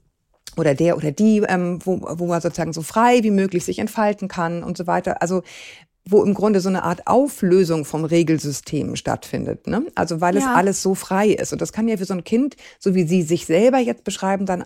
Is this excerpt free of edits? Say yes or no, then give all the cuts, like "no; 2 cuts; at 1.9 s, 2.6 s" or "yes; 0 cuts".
yes; 0 cuts